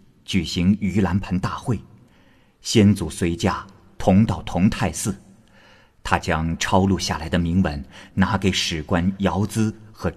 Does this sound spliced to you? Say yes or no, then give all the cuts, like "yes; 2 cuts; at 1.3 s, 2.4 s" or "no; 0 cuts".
no; 0 cuts